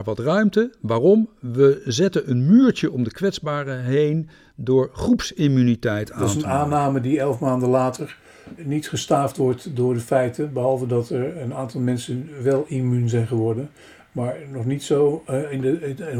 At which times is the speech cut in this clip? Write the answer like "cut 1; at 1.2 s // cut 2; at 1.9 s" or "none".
cut 1; at 8.6 s